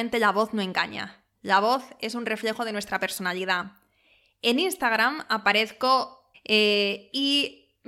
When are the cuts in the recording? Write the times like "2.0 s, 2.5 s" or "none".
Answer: 6.3 s